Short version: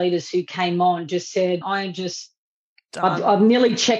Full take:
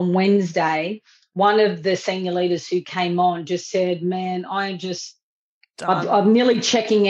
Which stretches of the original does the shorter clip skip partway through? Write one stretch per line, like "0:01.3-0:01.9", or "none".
0:04.0-0:04.5